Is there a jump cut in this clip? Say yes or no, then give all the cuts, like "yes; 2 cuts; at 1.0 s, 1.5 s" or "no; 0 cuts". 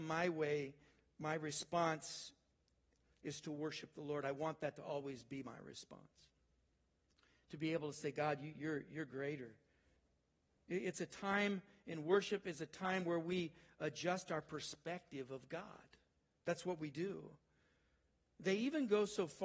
no; 0 cuts